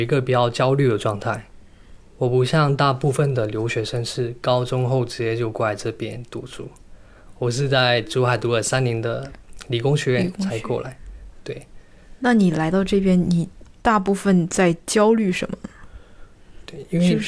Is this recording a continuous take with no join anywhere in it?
no; 1 cut; at 3.7 s

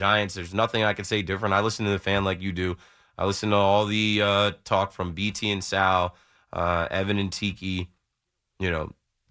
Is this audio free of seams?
yes; 0 cuts

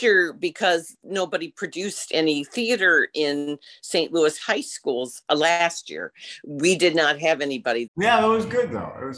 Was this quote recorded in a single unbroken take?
no; 1 cut; at 7.9 s

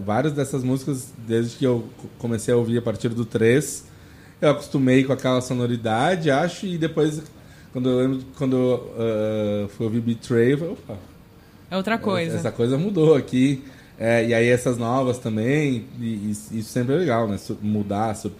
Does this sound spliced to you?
no; 0 cuts

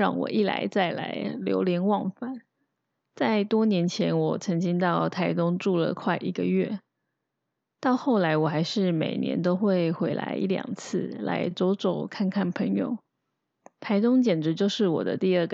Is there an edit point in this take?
no; 0 cuts

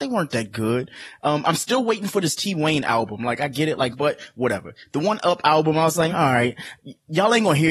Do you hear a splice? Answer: yes; 2 cuts; at 3.9 s, 6.1 s

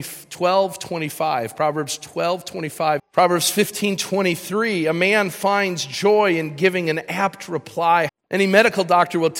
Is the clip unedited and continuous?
no; 2 cuts; at 3.0 s, 8.1 s

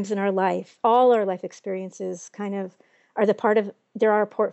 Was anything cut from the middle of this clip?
no; 0 cuts

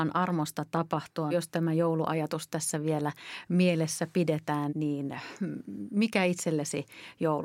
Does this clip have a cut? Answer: yes; 2 cuts; at 1.3 s, 4.7 s

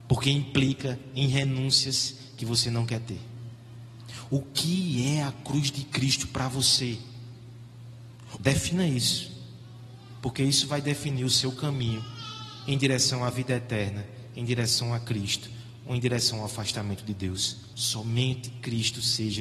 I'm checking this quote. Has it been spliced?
yes; 2 cuts; at 8.4 s, 17.7 s

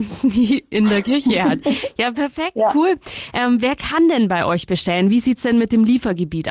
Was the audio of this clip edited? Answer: no; 0 cuts

